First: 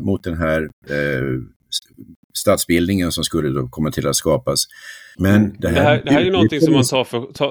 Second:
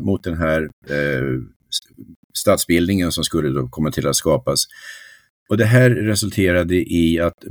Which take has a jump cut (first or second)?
first